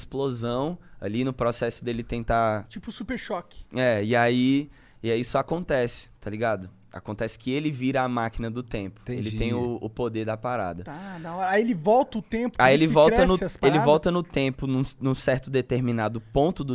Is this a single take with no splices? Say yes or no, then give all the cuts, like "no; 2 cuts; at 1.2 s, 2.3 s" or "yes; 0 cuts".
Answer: yes; 0 cuts